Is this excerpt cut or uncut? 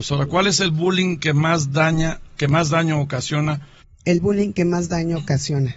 cut